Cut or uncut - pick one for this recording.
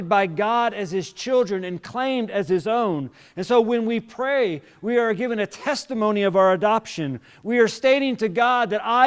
uncut